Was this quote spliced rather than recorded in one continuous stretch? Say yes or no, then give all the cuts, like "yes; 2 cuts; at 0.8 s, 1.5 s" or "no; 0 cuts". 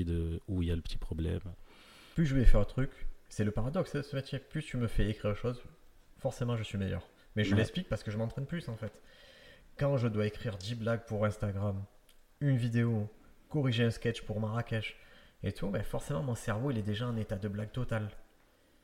yes; 1 cut; at 2.1 s